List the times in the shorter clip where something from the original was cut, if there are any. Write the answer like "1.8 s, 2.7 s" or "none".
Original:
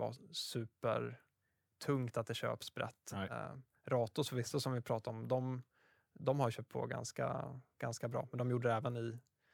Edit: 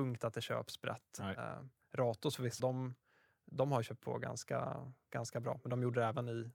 2.6 s